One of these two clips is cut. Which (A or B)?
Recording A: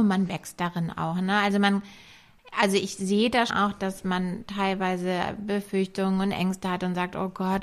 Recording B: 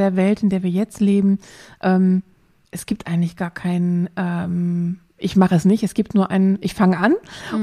A